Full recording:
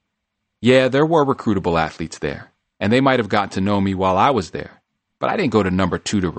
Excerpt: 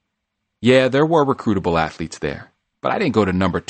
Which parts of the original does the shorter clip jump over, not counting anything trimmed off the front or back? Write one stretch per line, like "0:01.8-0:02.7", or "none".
0:02.7-0:05.1